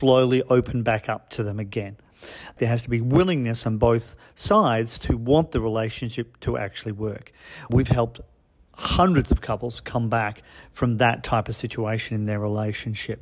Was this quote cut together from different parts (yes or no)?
yes